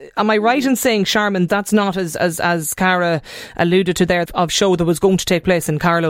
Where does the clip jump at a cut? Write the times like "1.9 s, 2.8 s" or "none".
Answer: 1.5 s, 4.3 s